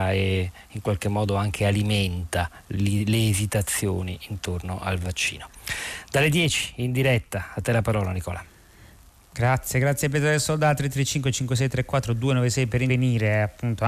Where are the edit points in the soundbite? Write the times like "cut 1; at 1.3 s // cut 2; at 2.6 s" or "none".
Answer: none